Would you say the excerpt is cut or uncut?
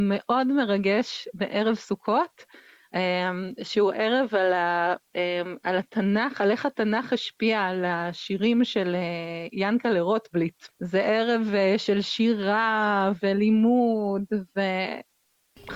cut